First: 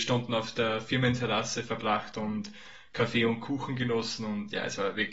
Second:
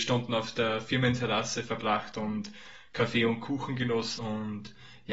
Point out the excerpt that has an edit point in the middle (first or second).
second